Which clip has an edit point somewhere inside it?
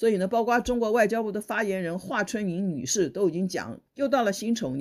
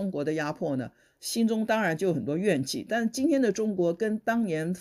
first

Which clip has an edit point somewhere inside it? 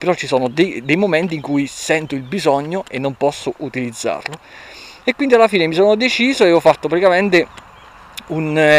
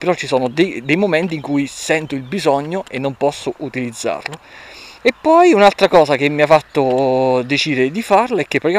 second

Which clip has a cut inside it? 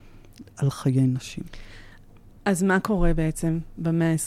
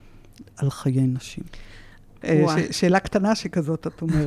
second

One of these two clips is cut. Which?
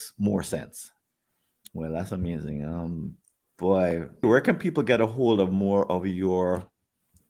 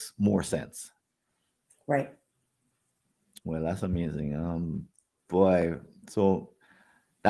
first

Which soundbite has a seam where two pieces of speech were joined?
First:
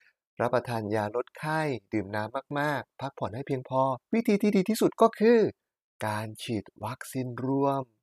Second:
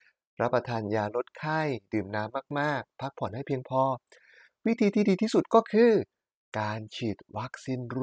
first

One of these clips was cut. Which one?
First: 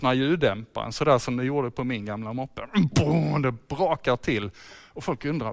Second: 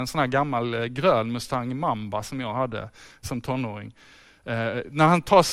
second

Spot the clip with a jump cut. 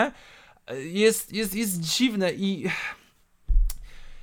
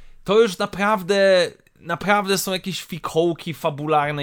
first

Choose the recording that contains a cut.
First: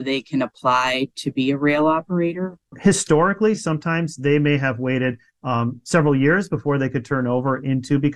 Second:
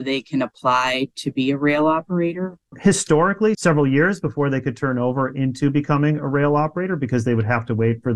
second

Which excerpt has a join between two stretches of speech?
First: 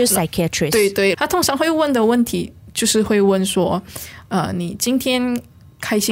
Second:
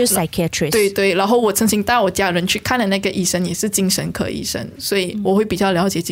first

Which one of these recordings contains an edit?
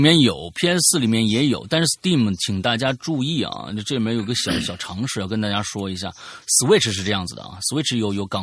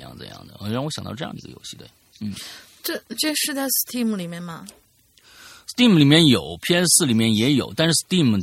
first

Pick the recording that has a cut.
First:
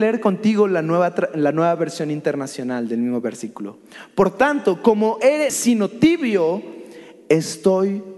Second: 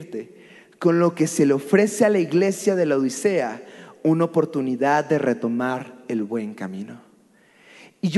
first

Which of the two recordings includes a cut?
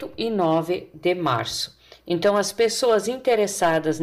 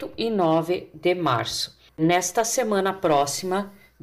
second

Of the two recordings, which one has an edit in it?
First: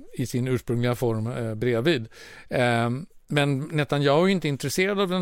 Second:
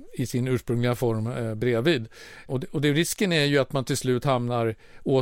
second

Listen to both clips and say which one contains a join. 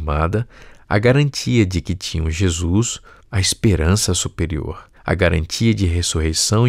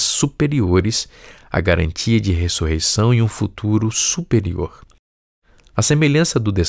first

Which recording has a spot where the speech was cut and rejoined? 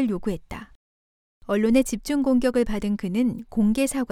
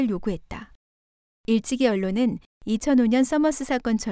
second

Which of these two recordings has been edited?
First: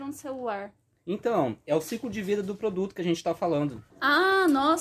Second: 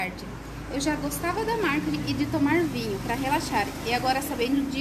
first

